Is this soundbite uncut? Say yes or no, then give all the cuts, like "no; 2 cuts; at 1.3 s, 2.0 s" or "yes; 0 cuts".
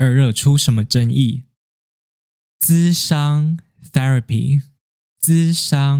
yes; 0 cuts